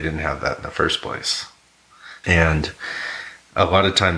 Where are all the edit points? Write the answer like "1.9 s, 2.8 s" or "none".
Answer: 2.2 s